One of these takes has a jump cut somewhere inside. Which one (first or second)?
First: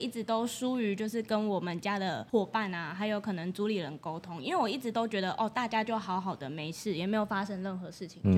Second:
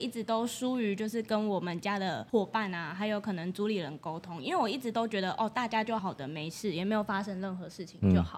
second